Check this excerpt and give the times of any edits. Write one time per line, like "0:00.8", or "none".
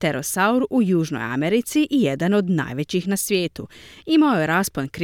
none